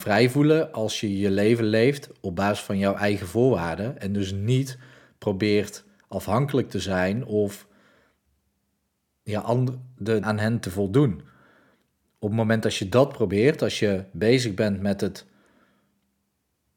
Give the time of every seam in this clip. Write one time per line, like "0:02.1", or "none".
0:10.2